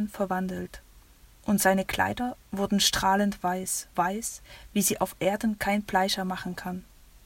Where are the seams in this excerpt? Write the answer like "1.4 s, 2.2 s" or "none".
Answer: 3.9 s